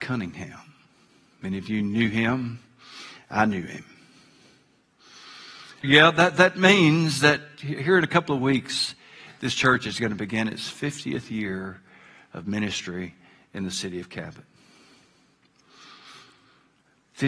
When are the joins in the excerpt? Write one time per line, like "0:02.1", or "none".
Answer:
0:05.8